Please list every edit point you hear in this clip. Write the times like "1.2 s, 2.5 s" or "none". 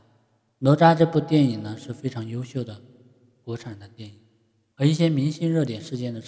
4.7 s

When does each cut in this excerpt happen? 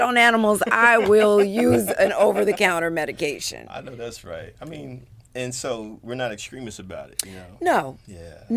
none

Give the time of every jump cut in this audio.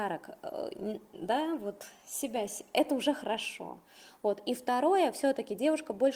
none

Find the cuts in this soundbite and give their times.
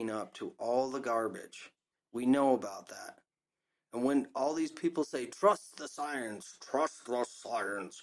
2.0 s

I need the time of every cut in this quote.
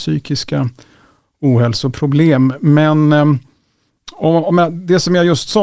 none

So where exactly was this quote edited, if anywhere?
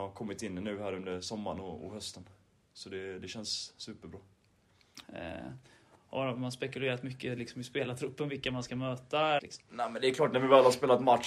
5.0 s, 9.4 s

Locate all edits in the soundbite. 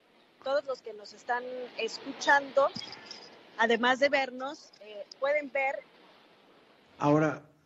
none

